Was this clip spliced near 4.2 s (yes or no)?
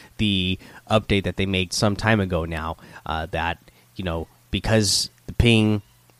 no